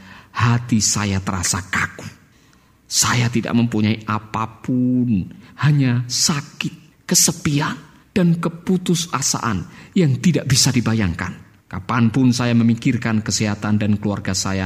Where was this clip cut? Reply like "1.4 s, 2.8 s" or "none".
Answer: 11.6 s